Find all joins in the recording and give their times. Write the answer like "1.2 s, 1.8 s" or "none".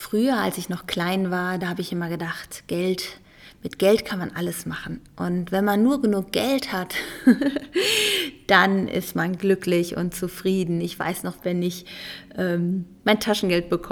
11.4 s